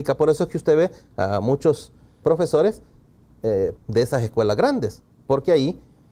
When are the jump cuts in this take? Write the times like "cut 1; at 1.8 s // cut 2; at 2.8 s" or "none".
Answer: cut 1; at 2.2 s // cut 2; at 3.8 s